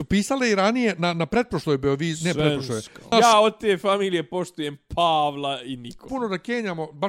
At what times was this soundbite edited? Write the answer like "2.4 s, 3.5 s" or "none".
3.1 s, 6.1 s